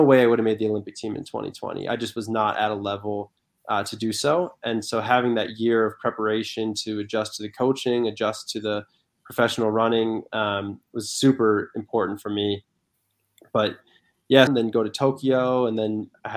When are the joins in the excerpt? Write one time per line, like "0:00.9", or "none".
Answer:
0:14.5